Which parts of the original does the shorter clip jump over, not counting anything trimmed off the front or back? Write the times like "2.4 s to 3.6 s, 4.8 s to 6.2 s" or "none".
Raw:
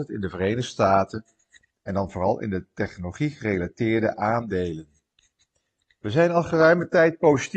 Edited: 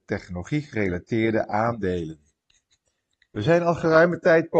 none